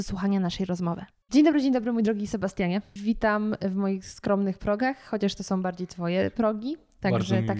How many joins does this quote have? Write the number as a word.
one